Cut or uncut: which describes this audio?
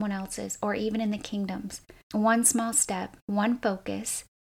cut